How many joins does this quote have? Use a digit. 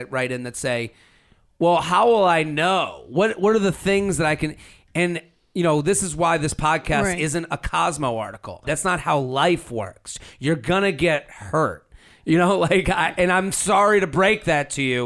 1